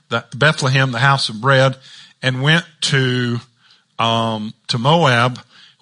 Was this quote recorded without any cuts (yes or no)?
yes